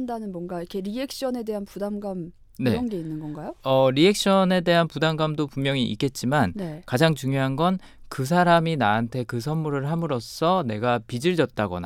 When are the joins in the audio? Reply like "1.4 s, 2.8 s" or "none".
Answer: none